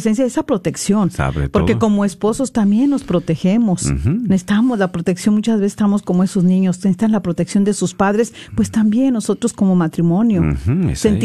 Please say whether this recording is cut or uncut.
uncut